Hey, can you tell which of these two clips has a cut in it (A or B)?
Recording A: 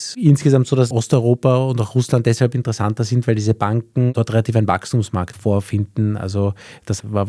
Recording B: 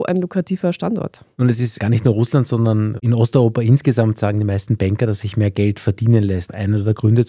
A